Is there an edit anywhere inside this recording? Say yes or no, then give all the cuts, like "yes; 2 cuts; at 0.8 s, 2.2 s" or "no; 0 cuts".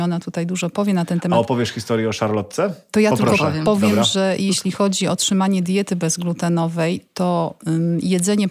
no; 0 cuts